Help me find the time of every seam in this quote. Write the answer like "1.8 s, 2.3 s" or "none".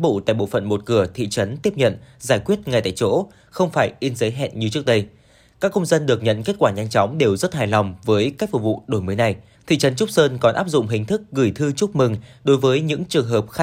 9.5 s